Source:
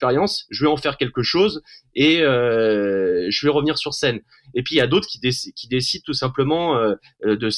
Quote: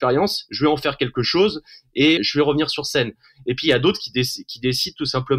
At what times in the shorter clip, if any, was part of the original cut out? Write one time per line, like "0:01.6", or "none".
0:02.2